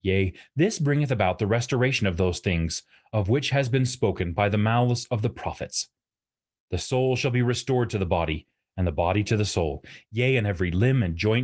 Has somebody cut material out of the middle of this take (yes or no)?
no